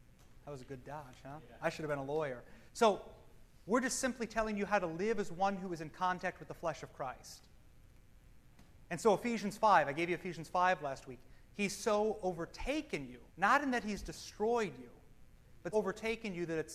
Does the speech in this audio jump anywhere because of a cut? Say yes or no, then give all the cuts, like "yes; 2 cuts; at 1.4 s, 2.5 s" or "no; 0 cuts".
yes; 3 cuts; at 2.7 s, 13.3 s, 15.7 s